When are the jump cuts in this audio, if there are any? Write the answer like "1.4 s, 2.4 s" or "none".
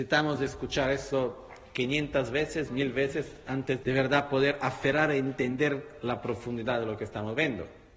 3.8 s